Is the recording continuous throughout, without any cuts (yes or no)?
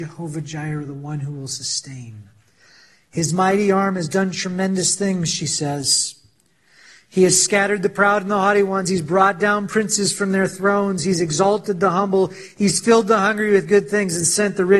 yes